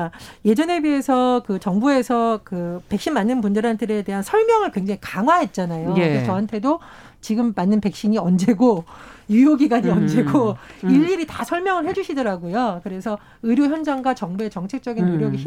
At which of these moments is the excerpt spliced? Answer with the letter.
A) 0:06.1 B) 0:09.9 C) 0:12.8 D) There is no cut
D